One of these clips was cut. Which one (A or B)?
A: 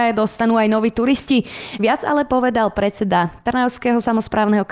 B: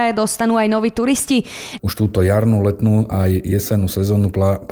B